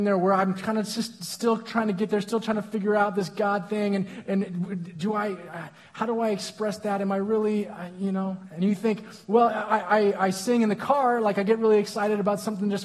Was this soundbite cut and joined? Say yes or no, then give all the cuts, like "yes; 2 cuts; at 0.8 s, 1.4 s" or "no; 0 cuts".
no; 0 cuts